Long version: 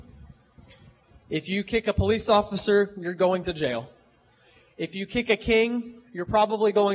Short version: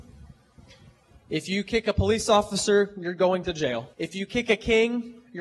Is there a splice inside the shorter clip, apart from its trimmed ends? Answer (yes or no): yes